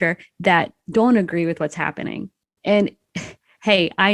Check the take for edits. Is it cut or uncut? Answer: uncut